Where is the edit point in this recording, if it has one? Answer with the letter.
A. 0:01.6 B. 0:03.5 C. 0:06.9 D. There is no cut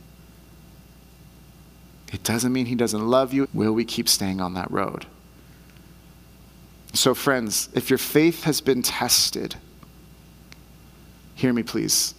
B